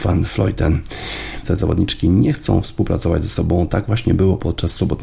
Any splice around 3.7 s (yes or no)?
no